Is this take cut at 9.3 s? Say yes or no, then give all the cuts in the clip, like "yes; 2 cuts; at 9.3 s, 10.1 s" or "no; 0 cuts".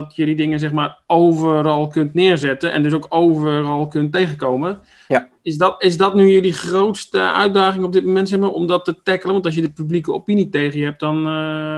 no; 1 cut; at 5.4 s